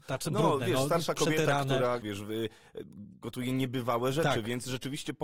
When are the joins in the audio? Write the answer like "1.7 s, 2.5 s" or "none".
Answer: 2.0 s